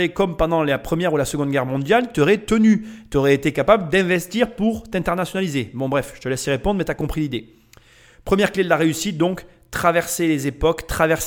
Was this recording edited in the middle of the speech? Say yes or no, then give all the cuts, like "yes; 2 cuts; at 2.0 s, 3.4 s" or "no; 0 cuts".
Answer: no; 0 cuts